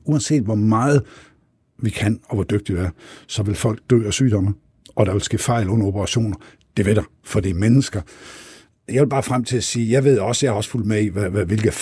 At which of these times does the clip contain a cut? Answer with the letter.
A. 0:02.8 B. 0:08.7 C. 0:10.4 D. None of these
B